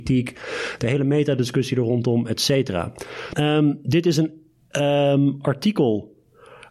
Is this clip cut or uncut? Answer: cut